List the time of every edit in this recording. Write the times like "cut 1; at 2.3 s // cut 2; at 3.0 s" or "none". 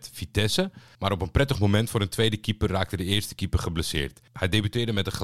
cut 1; at 0.9 s